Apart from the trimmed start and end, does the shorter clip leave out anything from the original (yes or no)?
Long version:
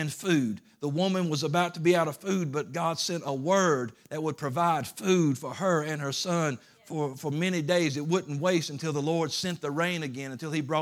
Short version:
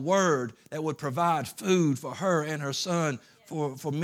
no